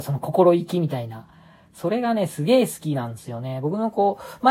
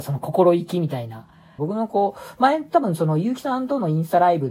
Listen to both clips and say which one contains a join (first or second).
second